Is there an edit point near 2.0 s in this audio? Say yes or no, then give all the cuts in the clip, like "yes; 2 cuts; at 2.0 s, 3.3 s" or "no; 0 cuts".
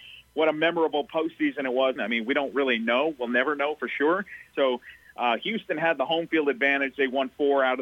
yes; 2 cuts; at 2.0 s, 4.5 s